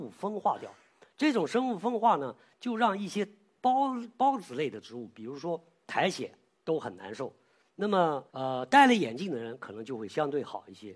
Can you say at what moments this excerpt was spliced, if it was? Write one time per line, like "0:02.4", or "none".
0:06.6
0:08.3